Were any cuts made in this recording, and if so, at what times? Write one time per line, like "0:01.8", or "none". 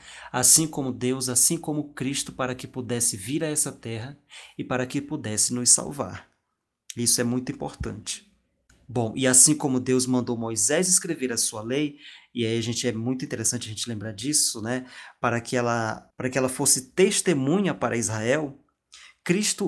0:16.1